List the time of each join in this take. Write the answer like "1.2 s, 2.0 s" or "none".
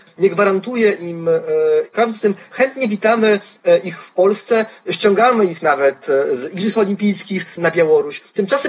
1.9 s, 7.6 s